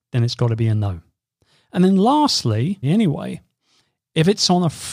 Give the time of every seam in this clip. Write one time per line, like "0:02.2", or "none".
0:02.8

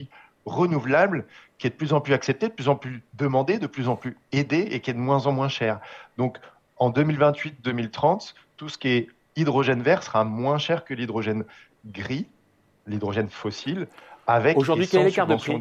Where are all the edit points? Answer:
none

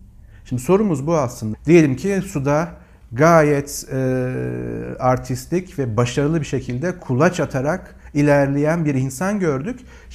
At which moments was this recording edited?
0:01.5

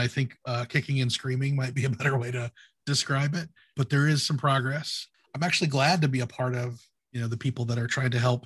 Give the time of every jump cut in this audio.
none

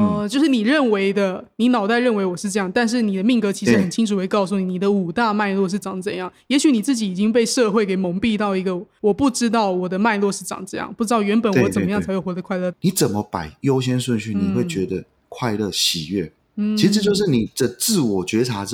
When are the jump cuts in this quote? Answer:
0:12.7

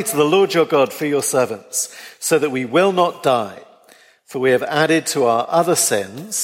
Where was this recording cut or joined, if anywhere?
none

